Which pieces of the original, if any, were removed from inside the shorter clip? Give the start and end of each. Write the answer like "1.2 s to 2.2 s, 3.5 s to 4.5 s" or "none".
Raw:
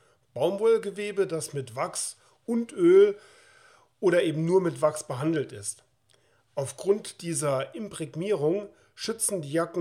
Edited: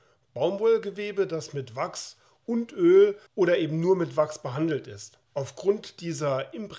3.3 s to 3.9 s, 5.9 s to 6.4 s